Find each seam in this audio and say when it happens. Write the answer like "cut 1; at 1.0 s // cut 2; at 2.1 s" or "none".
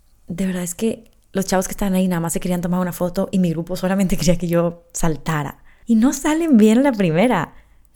cut 1; at 5.8 s